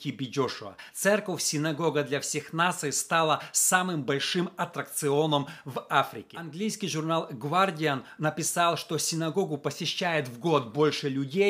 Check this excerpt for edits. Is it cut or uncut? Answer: uncut